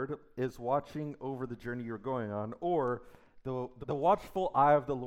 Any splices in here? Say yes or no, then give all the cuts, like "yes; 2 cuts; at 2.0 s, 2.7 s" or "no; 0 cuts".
yes; 1 cut; at 3.8 s